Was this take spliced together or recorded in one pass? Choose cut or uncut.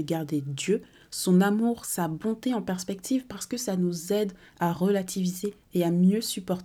uncut